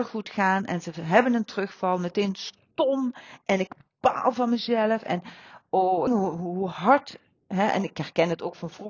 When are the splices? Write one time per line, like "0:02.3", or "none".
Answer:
0:06.1